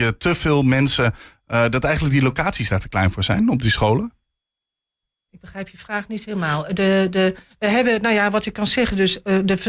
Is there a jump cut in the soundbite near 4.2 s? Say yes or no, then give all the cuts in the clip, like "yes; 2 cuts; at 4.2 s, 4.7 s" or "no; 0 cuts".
no; 0 cuts